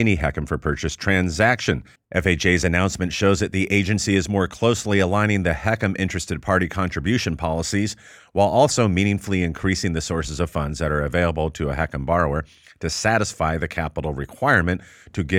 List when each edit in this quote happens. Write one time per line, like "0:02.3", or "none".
0:02.0
0:08.2